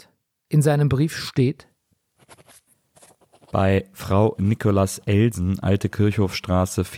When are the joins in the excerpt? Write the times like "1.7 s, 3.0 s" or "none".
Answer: none